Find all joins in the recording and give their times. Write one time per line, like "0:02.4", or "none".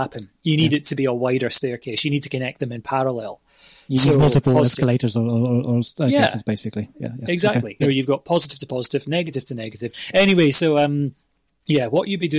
0:07.8
0:09.9